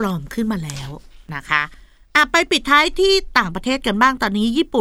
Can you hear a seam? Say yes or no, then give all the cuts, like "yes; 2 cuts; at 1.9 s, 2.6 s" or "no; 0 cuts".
no; 0 cuts